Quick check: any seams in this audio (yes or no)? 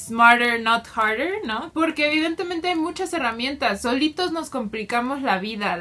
yes